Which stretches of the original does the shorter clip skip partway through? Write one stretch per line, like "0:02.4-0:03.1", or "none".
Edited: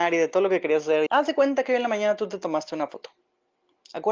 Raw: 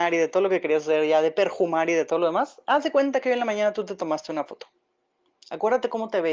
0:01.1-0:02.6